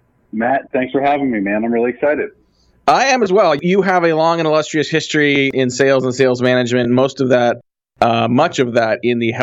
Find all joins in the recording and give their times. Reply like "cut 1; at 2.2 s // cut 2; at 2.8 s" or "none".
none